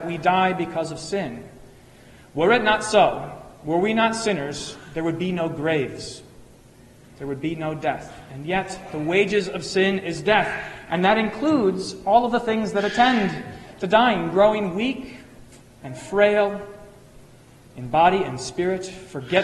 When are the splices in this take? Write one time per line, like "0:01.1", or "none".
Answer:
none